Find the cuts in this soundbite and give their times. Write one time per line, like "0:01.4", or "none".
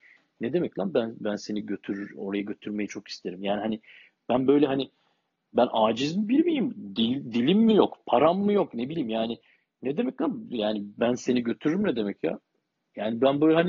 none